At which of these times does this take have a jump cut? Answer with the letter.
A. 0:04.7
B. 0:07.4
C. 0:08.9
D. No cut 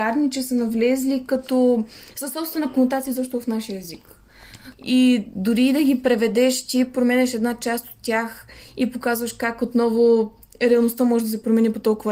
A